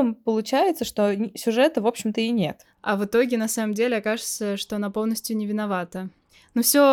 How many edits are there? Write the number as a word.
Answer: one